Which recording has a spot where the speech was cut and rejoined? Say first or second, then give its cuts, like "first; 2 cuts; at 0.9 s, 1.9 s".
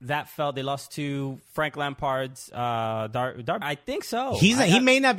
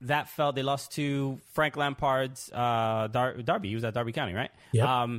first; 1 cut; at 3.6 s